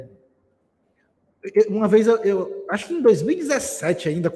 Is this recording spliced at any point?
no; 0 cuts

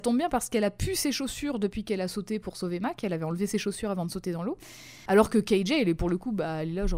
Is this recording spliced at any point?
yes; 1 cut; at 5.1 s

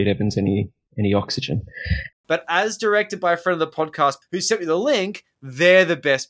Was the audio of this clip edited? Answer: yes; 2 cuts; at 2.1 s, 4.2 s

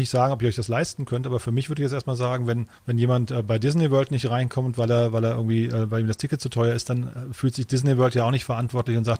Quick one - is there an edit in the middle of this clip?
yes; 1 cut; at 2.8 s

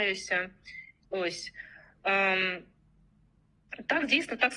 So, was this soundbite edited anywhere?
yes; 1 cut; at 1.0 s

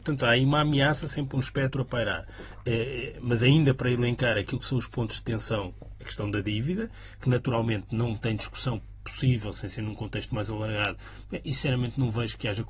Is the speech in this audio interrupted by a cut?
no; 0 cuts

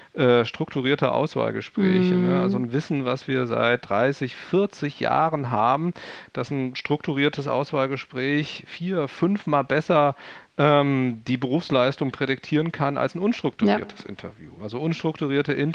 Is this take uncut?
yes; 0 cuts

